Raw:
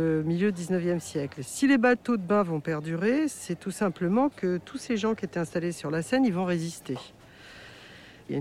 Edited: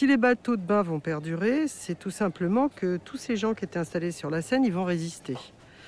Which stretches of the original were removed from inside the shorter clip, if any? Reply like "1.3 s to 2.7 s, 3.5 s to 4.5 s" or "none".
none